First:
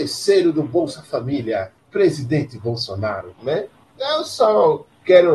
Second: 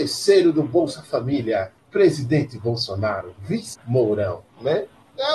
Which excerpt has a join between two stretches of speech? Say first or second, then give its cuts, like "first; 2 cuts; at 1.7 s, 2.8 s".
first; 1 cut; at 3.3 s